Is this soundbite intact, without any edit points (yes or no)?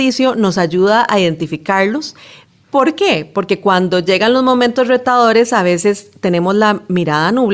yes